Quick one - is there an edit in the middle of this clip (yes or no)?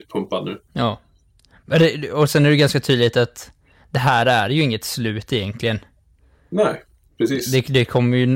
no